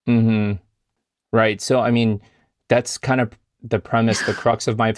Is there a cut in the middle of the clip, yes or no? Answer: no